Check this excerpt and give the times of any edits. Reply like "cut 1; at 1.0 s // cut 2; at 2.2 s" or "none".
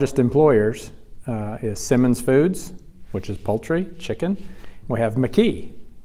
cut 1; at 4.8 s